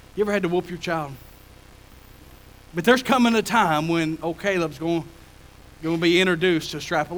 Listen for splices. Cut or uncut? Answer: cut